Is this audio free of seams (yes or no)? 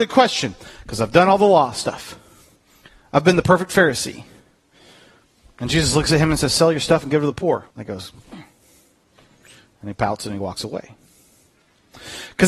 no